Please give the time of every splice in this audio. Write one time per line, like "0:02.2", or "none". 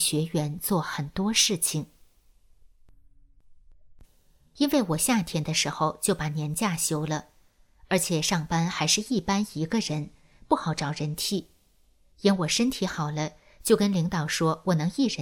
0:04.0

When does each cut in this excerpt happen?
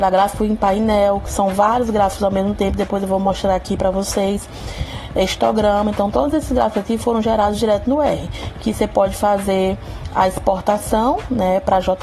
none

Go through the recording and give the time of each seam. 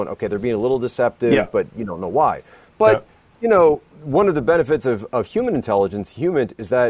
0:03.9

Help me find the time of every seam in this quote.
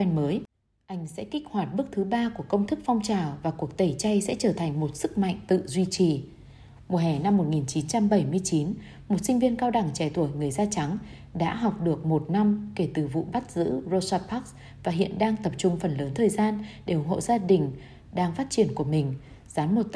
none

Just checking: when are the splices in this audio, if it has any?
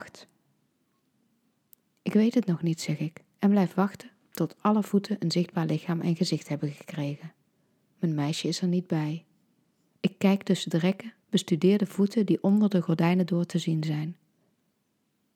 0:09.9
0:11.2

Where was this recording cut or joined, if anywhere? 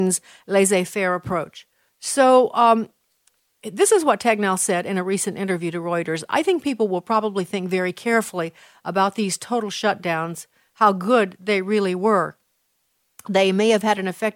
0:01.9

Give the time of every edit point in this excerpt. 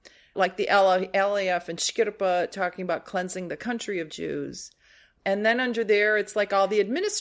none

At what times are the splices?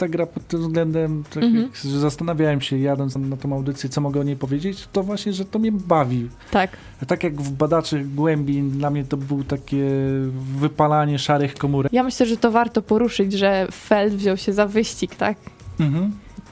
0:03.2
0:11.9

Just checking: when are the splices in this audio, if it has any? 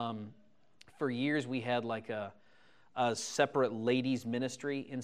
none

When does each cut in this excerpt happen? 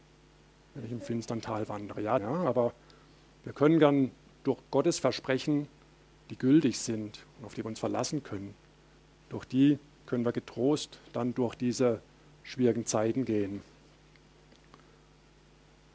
0:02.2

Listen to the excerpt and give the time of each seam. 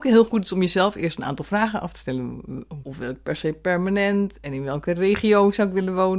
0:02.8

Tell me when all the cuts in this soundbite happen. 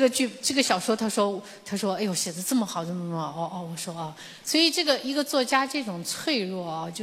none

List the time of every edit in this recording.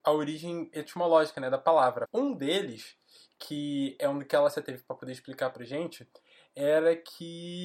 0:02.1

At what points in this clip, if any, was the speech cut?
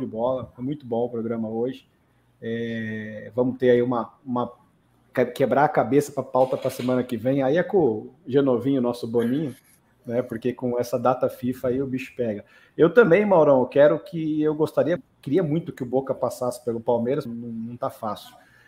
0:15.0
0:17.3

